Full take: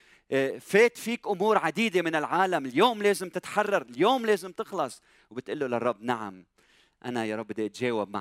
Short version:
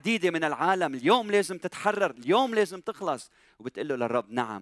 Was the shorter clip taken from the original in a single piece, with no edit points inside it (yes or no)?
yes